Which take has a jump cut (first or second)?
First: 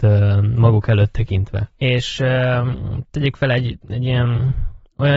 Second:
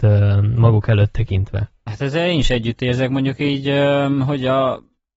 first